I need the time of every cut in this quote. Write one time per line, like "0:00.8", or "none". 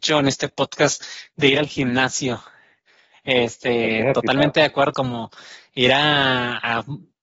0:04.9